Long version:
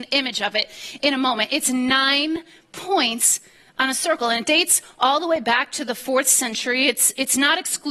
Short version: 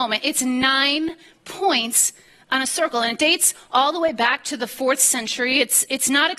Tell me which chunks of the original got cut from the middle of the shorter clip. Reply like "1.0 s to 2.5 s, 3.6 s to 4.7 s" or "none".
none